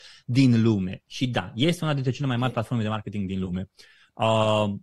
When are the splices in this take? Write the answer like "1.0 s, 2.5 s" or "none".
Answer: none